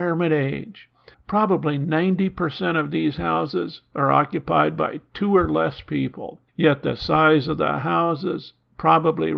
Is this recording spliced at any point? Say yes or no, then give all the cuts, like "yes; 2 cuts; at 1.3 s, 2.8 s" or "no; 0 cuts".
yes; 2 cuts; at 1.1 s, 6.5 s